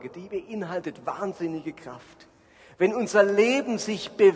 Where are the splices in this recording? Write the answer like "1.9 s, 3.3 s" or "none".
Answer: none